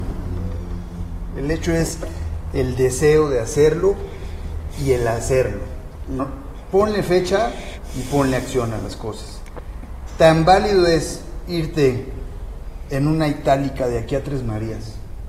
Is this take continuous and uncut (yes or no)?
no